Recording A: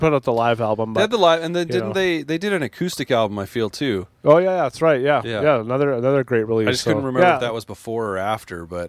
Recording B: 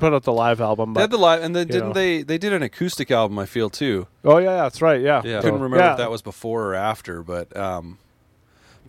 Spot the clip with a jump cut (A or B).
B